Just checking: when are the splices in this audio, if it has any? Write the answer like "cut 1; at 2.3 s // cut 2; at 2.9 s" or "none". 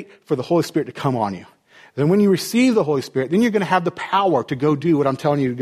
none